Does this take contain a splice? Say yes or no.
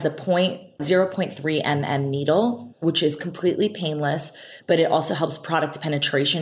no